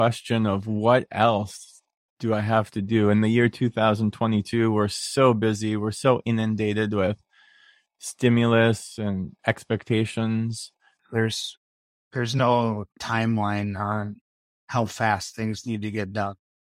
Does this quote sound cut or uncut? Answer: cut